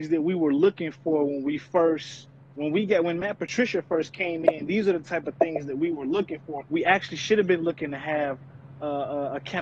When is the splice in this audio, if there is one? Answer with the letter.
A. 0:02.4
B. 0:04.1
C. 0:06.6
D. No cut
C